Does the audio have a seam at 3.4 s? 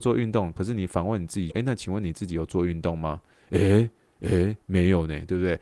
no; 1 cut; at 1.5 s

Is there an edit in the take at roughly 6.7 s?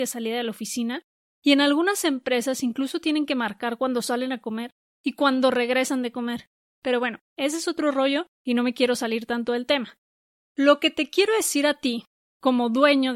yes; 1 cut; at 6.7 s

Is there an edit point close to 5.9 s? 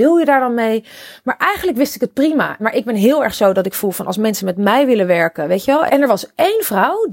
yes; 2 cuts; at 2.6 s, 5.9 s

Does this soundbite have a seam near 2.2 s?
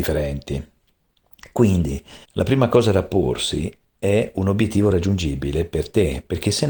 yes; 1 cut; at 2.2 s

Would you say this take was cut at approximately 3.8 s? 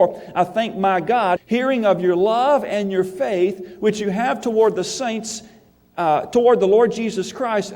no; 1 cut; at 1.4 s

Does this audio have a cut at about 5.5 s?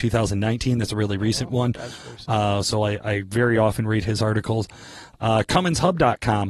no; 1 cut; at 2.2 s

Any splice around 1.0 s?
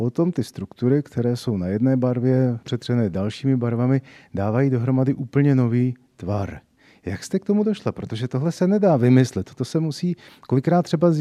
no; 1 cut; at 2.6 s

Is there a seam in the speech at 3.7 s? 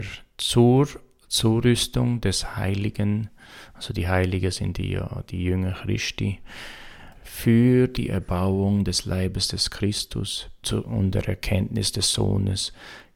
no; 2 cuts; at 7.1 s, 10.6 s

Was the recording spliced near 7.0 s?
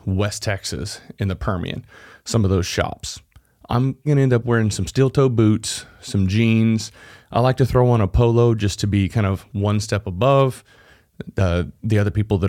no; 1 cut; at 4.1 s

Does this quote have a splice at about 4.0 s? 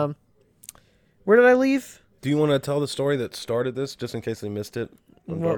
no; 1 cut; at 2.2 s

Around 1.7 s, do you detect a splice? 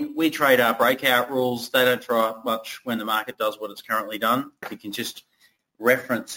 no; 1 cut; at 4.6 s

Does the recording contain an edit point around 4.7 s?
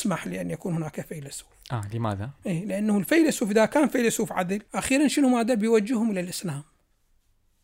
yes; 2 cuts; at 2.4 s, 4.7 s

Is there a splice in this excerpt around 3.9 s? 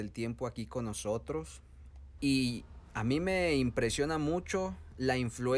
no; 1 cut; at 2.2 s

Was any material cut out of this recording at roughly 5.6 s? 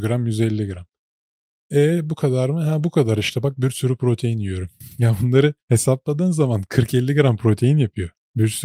yes; 1 cut; at 5.6 s

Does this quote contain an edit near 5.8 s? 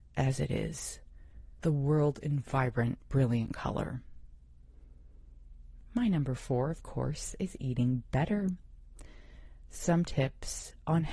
yes; 2 cuts; at 1.6 s, 5.8 s

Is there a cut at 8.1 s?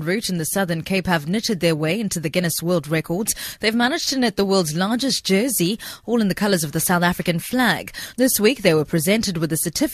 yes; 1 cut; at 8.1 s

